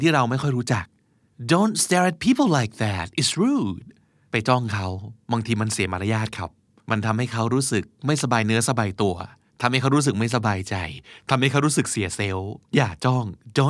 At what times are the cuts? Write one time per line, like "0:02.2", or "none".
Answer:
0:12.6